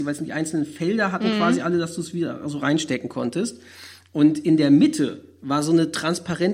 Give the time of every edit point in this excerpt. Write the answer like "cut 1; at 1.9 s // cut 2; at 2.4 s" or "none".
none